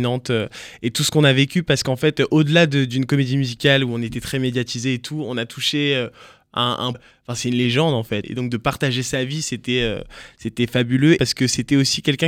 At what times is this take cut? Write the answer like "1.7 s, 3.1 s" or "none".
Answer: 6.9 s, 8.2 s, 11.2 s